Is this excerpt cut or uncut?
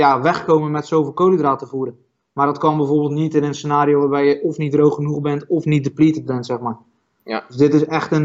uncut